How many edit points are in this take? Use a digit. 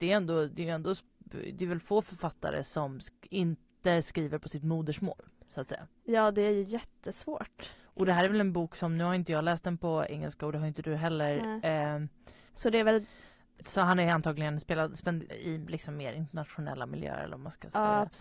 2